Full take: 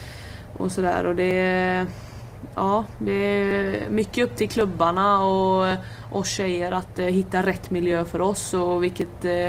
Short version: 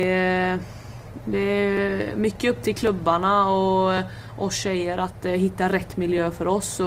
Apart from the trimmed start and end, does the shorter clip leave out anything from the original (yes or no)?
yes